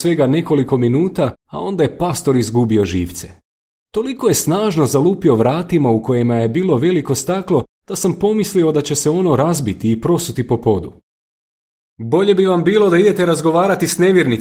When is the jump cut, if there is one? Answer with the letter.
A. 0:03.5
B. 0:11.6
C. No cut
C